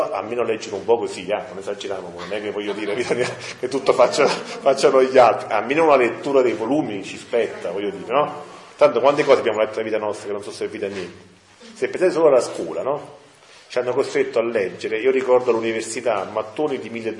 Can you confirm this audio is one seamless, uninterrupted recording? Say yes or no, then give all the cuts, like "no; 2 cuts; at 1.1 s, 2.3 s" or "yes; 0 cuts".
yes; 0 cuts